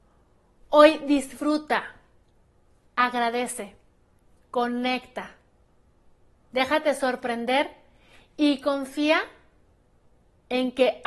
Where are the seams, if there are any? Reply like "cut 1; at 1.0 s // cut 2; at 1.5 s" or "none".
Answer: none